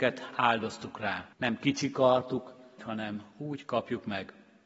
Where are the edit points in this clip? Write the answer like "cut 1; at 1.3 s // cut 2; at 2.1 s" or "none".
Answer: cut 1; at 1.3 s // cut 2; at 2.8 s